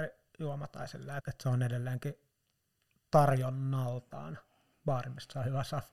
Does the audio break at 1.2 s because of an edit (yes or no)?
yes